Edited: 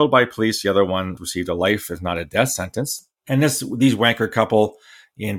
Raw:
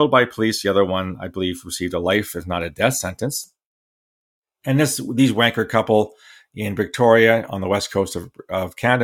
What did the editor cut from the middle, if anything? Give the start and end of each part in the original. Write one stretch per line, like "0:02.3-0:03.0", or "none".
0:01.2-0:01.6
0:03.6-0:04.5